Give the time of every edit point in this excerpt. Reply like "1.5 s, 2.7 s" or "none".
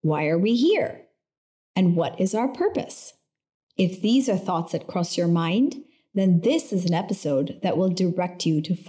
none

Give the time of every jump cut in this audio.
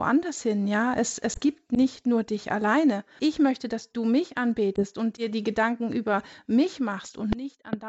3.2 s

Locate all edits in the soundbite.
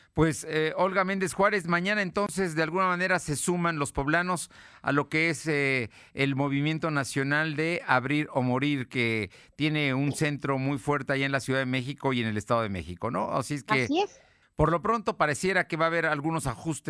14.4 s

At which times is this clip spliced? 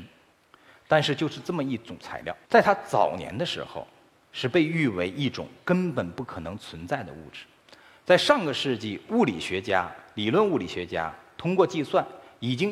2.4 s

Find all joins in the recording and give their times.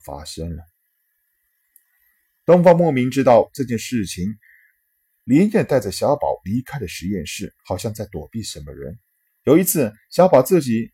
5.1 s, 7.6 s, 9.4 s

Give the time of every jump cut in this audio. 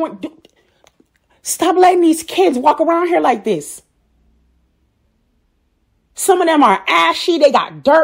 none

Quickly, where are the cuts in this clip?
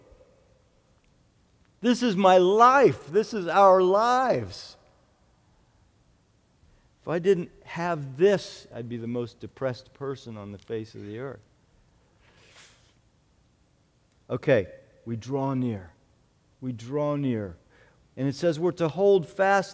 8.7 s, 18.0 s

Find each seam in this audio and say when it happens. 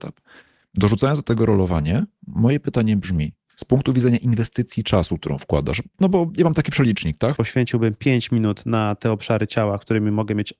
7.3 s

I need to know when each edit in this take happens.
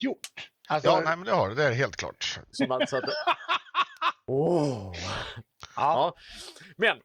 2.5 s

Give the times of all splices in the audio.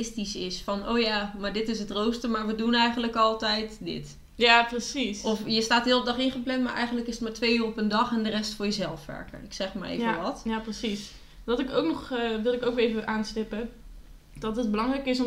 none

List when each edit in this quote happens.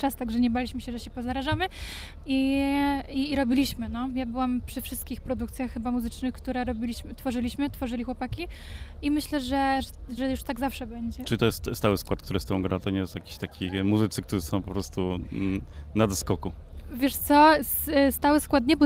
10.2 s

